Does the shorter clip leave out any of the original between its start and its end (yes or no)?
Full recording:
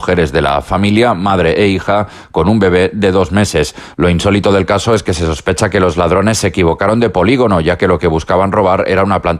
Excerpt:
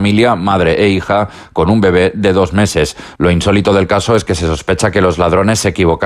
no